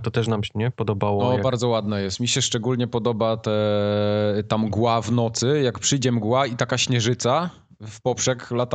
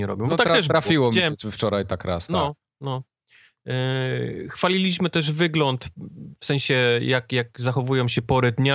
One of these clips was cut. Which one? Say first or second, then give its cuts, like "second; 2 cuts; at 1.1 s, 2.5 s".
second; 1 cut; at 2.8 s